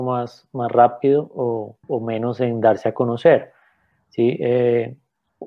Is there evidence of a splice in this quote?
yes; 1 cut; at 1.8 s

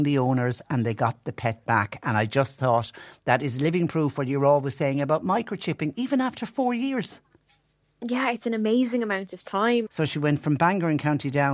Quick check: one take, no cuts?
no; 1 cut; at 9.9 s

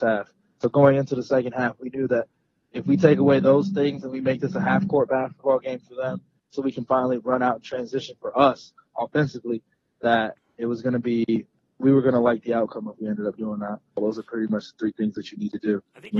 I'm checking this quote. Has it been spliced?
yes; 2 cuts; at 8.2 s, 14.0 s

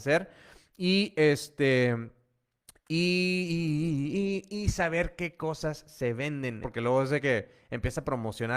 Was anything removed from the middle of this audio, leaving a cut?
yes; 1 cut; at 6.6 s

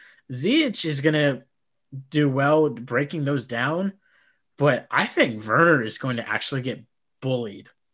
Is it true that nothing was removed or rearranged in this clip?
yes; 0 cuts

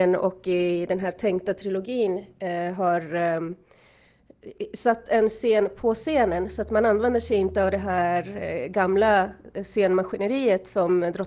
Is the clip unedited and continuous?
yes; 0 cuts

